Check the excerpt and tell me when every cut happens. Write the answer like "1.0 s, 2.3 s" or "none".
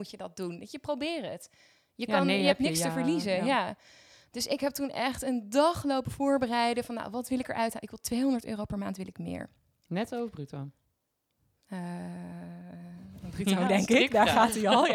none